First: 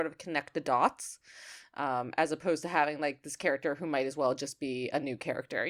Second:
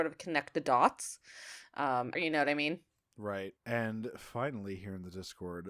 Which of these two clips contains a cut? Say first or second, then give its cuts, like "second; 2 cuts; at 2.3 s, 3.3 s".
second; 2 cuts; at 2.2 s, 3.6 s